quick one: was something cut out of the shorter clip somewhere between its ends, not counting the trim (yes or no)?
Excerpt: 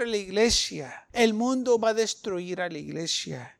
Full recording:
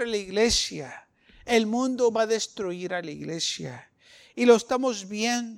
yes